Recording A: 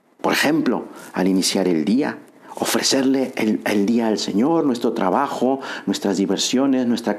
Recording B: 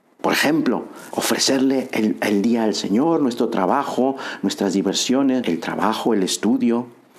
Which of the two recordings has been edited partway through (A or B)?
B